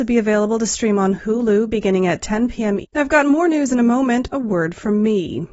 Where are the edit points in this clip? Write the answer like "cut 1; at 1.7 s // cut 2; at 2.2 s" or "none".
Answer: cut 1; at 2.8 s // cut 2; at 4.3 s